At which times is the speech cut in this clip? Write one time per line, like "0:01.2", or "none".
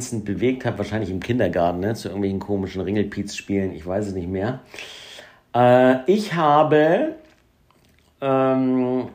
none